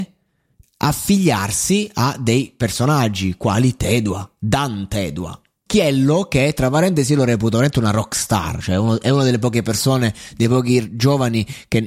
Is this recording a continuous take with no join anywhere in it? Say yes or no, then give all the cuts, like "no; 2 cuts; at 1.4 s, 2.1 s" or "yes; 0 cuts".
no; 1 cut; at 5.7 s